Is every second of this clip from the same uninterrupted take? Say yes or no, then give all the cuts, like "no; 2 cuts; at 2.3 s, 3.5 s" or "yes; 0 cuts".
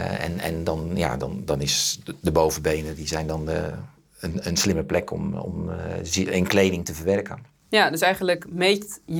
yes; 0 cuts